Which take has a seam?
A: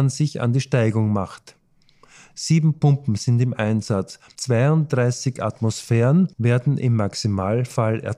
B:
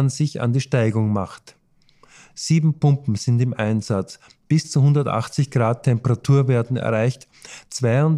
A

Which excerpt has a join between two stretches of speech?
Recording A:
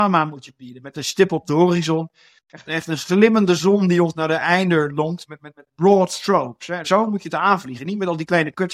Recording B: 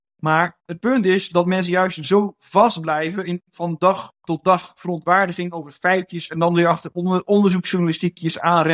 A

